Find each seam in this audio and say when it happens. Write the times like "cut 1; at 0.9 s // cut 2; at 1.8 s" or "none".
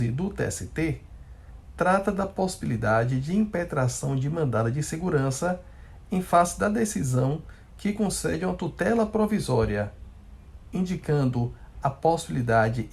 none